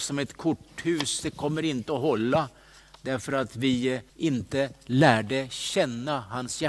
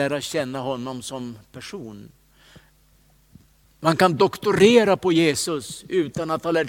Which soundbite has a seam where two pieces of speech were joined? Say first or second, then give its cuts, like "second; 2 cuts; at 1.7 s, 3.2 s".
first; 1 cut; at 4.1 s